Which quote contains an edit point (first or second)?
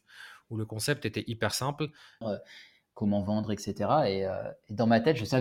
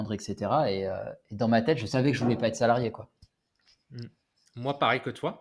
first